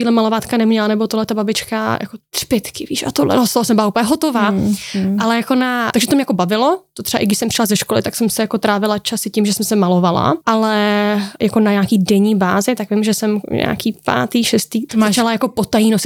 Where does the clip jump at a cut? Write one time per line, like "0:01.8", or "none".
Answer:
0:05.9
0:14.9